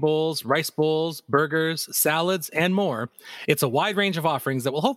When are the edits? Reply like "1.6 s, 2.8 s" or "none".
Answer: 1.9 s